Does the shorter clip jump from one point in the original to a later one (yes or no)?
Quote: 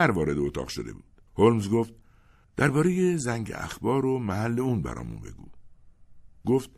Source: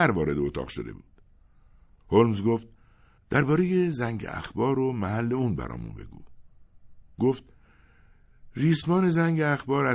yes